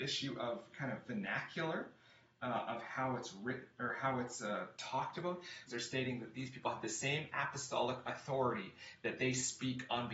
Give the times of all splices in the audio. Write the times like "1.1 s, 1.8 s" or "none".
5.7 s

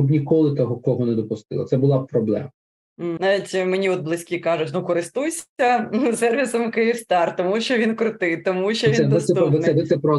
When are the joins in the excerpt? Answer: 3.2 s

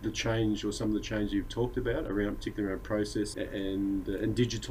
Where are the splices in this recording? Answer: 3.3 s

